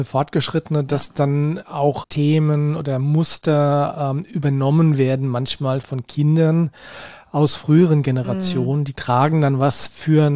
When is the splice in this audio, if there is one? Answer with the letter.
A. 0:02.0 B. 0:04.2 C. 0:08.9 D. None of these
A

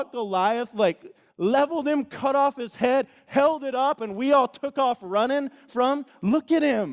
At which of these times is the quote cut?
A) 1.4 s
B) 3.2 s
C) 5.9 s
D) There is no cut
D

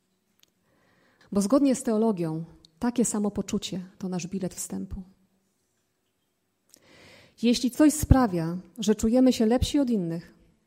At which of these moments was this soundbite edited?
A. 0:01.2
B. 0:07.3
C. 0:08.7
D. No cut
A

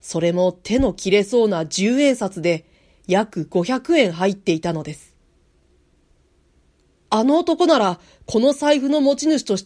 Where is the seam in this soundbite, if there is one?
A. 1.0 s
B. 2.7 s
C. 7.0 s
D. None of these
C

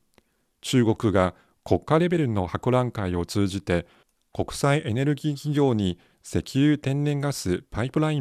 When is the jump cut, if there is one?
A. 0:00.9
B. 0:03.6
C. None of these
C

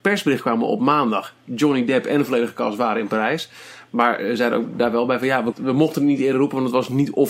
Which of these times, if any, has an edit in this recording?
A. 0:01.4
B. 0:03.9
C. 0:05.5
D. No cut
C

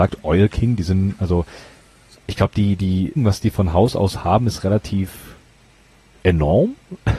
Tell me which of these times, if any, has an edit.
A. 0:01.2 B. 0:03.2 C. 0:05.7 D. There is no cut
B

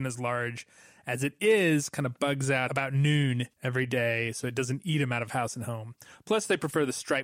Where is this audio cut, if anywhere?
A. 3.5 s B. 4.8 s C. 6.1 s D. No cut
A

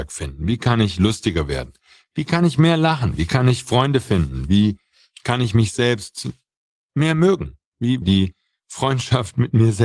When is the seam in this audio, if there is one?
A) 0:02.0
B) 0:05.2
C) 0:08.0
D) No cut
C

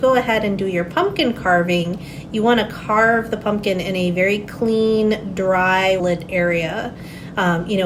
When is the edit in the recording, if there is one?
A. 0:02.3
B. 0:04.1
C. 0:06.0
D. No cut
C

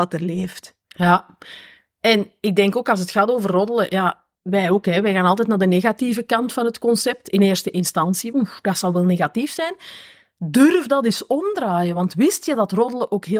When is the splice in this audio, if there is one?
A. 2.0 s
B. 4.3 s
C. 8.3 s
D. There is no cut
C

